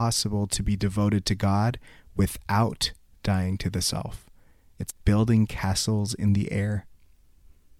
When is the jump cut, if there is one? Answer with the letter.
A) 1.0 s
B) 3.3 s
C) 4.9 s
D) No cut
C